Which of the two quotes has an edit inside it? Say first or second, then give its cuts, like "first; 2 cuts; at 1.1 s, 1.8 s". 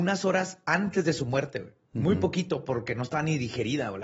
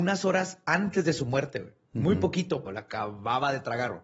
second; 1 cut; at 2.7 s